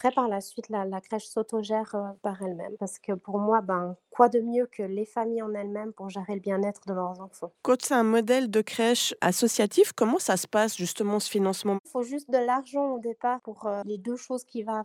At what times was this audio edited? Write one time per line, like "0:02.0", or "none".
0:02.8